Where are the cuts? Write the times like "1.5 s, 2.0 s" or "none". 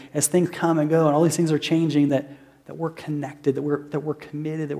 none

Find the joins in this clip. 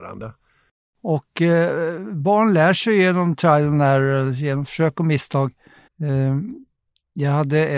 5.9 s

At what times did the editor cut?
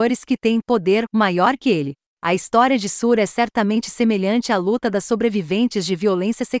none

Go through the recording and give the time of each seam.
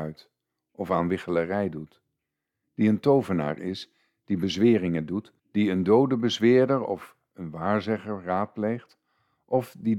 5.4 s

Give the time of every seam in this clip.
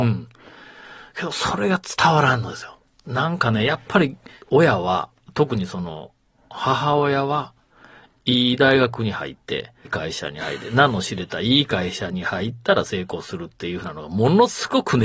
9.8 s

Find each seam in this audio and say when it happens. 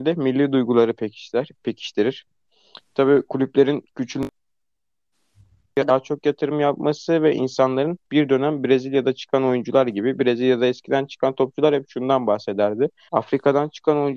13.1 s

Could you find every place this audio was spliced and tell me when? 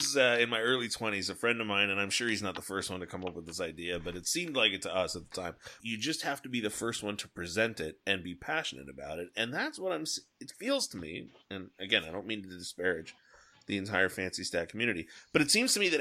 5.8 s

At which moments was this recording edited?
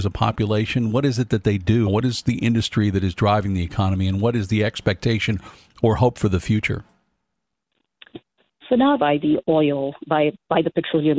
1.9 s, 9.0 s

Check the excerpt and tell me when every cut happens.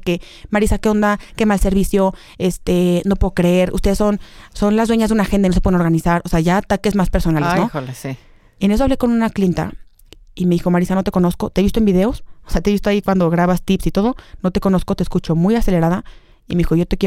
none

